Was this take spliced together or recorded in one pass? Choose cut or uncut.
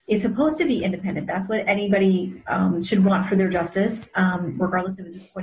uncut